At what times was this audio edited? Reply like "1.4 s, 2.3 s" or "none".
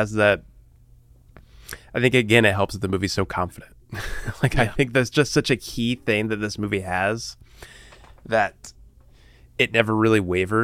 none